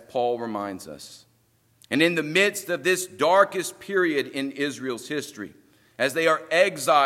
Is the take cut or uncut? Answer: cut